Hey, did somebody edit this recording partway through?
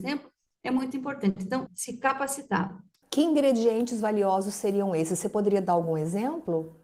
yes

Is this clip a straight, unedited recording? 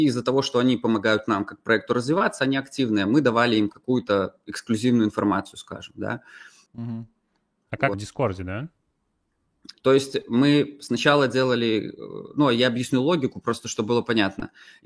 no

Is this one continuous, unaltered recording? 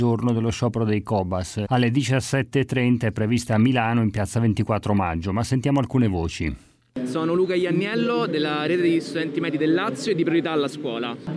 no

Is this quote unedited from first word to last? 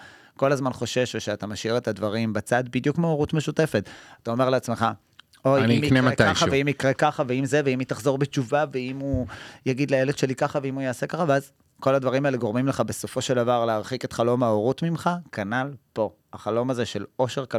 yes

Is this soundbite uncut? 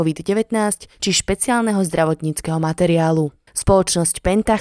no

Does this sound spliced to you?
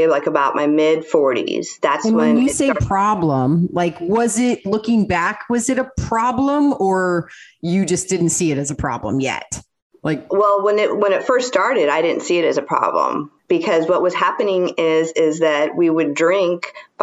no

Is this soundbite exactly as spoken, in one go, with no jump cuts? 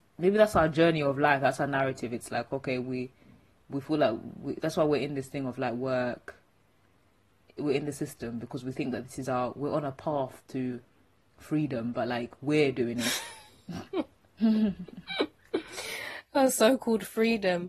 yes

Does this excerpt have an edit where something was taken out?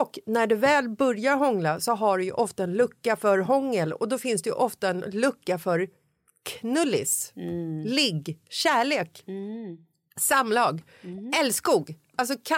no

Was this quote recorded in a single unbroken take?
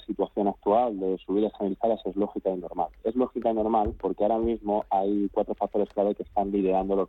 yes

